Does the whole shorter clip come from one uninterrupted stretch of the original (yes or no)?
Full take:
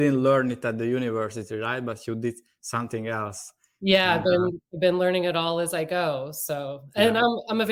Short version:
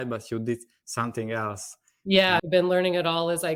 no